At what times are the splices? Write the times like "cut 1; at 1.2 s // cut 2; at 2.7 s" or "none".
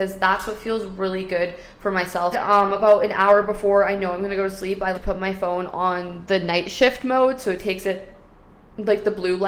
cut 1; at 2.3 s // cut 2; at 4.9 s

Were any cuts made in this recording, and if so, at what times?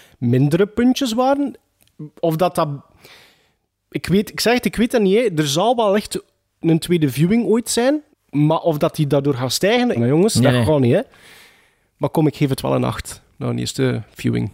cut 1; at 8.1 s // cut 2; at 10.0 s

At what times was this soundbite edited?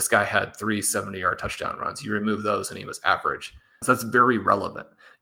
cut 1; at 3.8 s

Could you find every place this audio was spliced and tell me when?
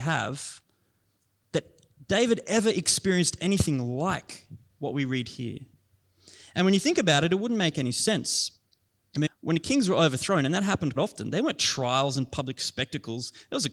cut 1; at 9.3 s // cut 2; at 11.0 s

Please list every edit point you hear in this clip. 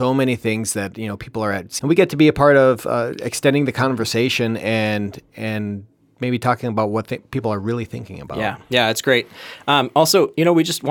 cut 1; at 1.8 s

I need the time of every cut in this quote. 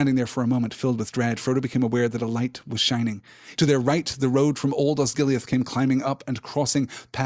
cut 1; at 3.6 s

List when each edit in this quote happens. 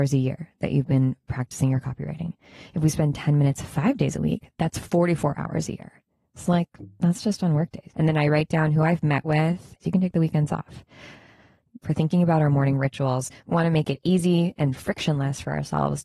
cut 1; at 7.9 s // cut 2; at 9.8 s // cut 3; at 11.8 s

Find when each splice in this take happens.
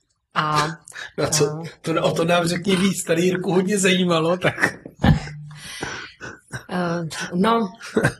none

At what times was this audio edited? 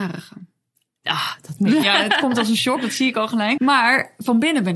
cut 1; at 1.8 s // cut 2; at 3.6 s

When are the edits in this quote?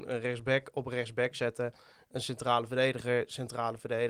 none

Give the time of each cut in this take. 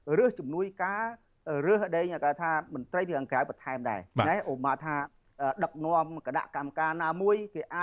cut 1; at 4.1 s

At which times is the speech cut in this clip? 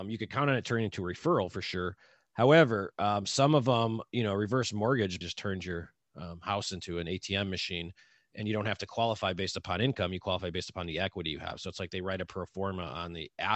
cut 1; at 5.2 s

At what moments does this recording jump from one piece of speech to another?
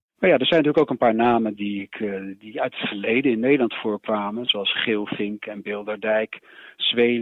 cut 1; at 1.6 s

